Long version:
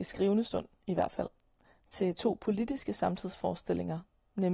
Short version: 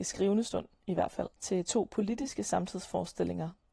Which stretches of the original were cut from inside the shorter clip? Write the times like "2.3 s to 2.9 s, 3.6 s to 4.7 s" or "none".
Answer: 1.3 s to 1.8 s